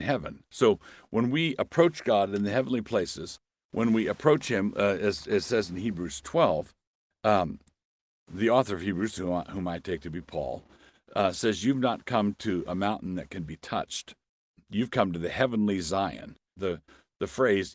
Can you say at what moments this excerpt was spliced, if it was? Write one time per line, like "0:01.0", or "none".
0:16.6